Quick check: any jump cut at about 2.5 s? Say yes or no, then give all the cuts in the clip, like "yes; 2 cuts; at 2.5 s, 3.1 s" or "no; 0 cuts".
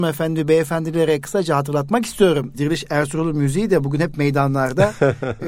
yes; 1 cut; at 2.5 s